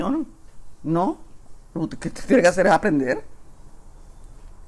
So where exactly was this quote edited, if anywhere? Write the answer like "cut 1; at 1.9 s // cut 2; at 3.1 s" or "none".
none